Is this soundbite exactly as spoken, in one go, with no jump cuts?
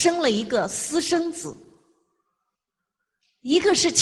yes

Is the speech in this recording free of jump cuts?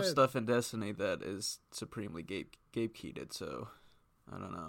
yes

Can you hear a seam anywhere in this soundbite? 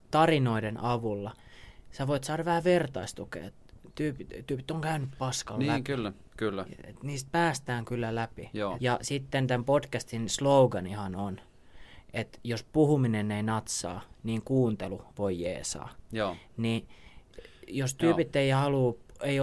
yes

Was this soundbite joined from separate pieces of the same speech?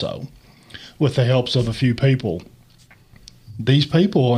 no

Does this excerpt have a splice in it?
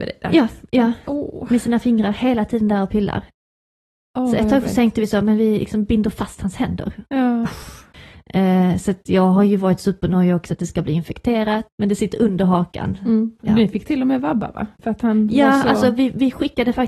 yes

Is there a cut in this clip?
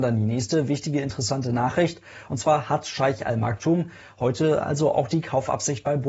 no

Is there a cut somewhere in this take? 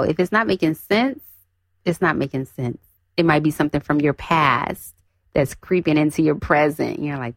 no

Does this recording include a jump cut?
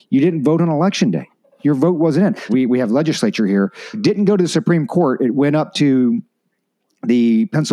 yes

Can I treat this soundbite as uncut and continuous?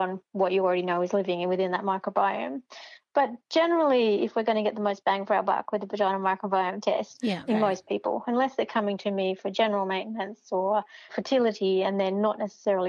no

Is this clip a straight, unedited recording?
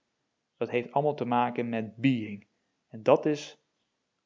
yes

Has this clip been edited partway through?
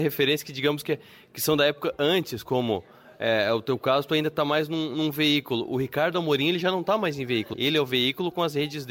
yes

